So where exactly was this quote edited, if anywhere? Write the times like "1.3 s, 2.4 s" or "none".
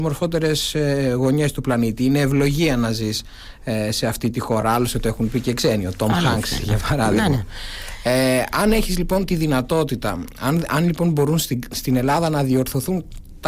none